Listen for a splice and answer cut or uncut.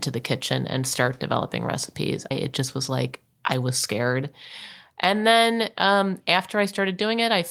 cut